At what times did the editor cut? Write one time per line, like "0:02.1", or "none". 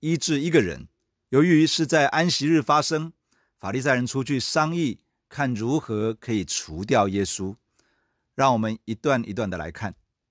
none